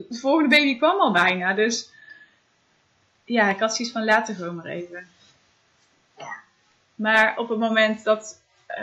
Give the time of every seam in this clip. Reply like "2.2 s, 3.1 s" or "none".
none